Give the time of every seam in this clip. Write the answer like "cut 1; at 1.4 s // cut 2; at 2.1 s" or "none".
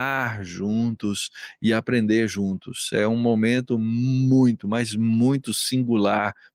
none